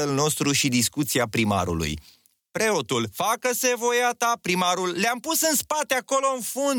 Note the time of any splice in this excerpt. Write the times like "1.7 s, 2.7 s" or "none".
2.4 s